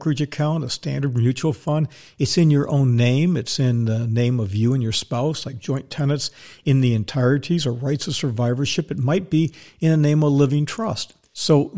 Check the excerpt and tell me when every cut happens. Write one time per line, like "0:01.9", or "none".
none